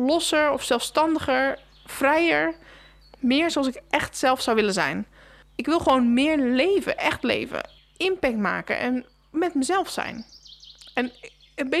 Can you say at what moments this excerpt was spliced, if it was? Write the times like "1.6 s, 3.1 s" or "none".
none